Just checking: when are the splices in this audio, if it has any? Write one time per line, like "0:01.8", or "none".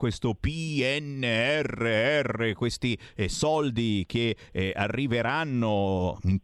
none